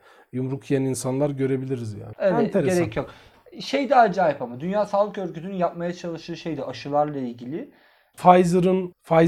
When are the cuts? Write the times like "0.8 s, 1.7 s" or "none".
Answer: 2.1 s, 8.1 s